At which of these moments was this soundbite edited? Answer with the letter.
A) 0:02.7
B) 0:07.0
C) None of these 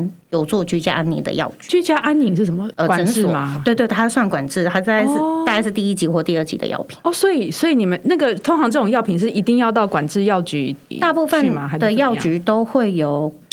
A